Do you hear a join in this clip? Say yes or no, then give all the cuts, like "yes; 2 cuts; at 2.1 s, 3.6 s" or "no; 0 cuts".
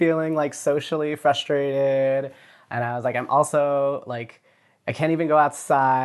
no; 0 cuts